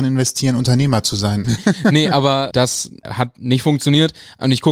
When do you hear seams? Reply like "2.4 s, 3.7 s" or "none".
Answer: 1.4 s